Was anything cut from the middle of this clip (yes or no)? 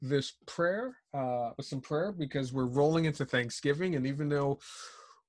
no